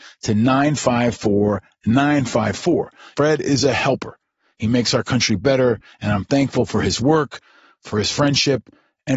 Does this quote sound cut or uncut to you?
cut